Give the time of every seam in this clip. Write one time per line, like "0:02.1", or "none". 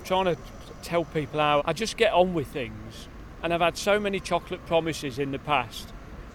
0:01.6